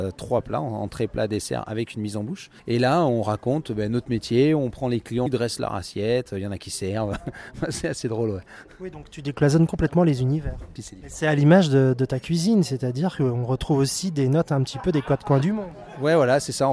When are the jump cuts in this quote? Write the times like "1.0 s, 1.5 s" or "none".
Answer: 2.6 s, 5.3 s, 10.8 s